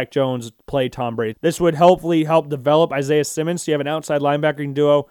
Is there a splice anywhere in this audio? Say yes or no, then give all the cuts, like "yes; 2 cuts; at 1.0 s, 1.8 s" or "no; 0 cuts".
yes; 1 cut; at 1.3 s